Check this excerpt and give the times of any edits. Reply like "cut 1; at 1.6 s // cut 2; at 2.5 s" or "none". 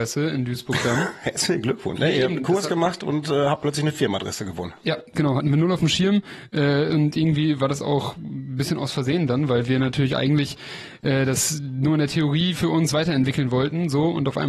cut 1; at 2.0 s